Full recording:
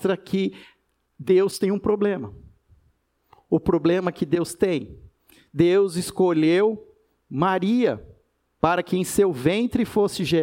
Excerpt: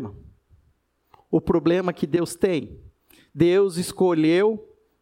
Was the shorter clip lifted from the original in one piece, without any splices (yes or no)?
yes